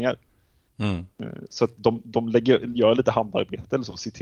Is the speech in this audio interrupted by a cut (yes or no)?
no